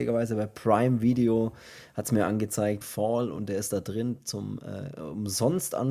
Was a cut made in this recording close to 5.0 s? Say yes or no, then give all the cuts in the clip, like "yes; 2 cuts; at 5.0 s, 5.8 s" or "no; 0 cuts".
no; 1 cut; at 2.8 s